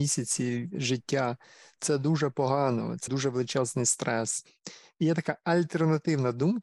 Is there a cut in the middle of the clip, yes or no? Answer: yes